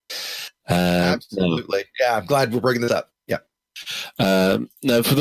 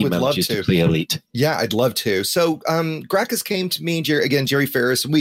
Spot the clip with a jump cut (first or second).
second